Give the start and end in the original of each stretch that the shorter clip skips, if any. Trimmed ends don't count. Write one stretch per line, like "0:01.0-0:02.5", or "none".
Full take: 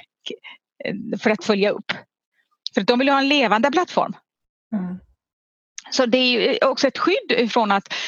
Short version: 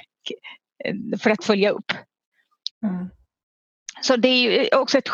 0:02.7-0:04.6